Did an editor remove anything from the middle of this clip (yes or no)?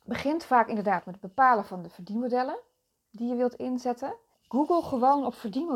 yes